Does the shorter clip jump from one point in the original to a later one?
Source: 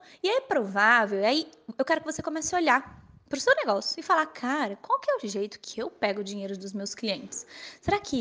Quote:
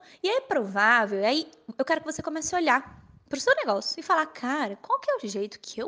no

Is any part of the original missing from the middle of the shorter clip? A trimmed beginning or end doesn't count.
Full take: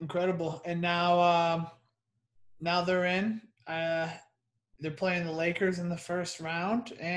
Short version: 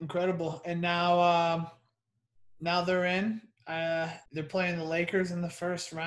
yes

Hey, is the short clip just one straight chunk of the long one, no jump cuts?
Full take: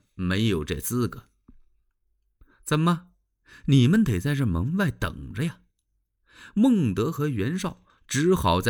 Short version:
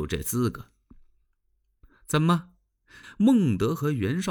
no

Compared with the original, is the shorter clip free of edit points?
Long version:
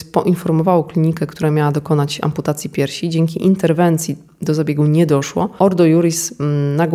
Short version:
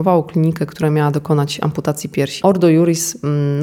no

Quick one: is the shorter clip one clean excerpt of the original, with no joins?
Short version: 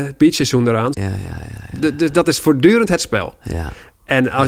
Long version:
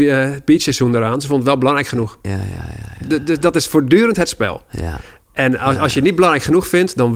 no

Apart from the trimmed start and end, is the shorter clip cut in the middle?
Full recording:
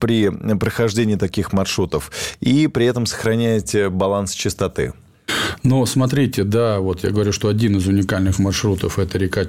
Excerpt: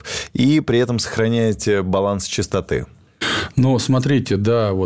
no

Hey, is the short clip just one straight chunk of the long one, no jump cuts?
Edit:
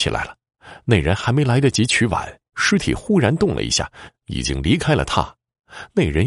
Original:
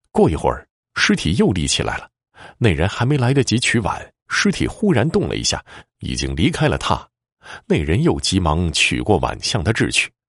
yes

